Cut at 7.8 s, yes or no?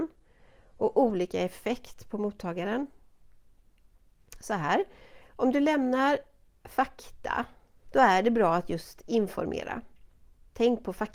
yes